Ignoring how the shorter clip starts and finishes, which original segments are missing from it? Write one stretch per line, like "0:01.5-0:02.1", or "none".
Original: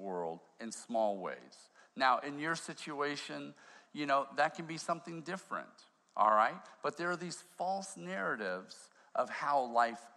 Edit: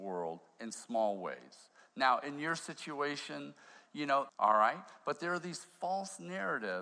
0:04.3-0:06.1